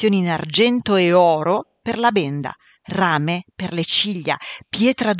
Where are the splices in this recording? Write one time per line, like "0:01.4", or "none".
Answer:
none